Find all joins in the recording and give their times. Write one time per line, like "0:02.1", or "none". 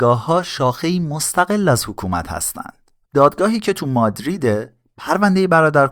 0:03.0